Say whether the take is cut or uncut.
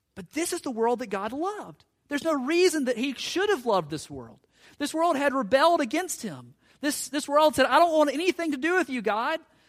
uncut